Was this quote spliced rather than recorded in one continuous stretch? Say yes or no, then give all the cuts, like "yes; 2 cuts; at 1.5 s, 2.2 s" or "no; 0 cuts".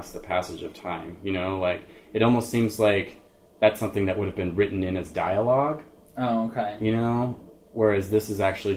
no; 0 cuts